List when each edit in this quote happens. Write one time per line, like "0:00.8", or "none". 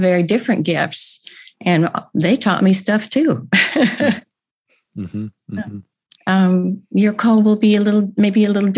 0:06.2